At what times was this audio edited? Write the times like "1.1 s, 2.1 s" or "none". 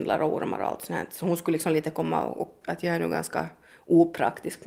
2.6 s